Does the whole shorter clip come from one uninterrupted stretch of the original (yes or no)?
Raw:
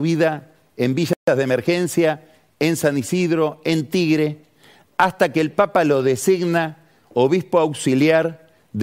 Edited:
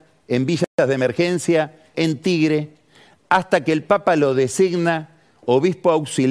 no